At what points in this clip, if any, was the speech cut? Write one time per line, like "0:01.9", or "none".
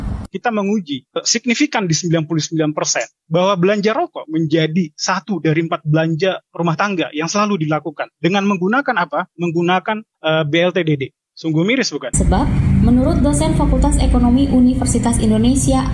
0:12.1